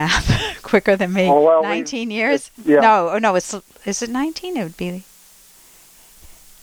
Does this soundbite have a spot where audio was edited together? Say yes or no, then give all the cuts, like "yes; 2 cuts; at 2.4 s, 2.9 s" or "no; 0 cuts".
yes; 1 cut; at 2.5 s